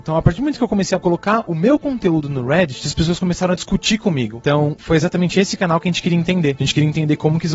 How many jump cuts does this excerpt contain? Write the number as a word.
one